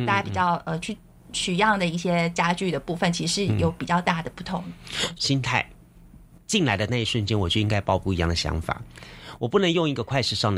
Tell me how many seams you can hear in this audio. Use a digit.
1